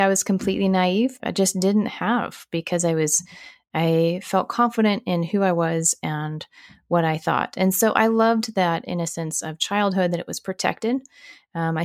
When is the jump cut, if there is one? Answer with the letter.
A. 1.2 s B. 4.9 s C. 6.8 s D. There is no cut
A